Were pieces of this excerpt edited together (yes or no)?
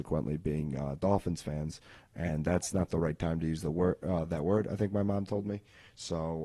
no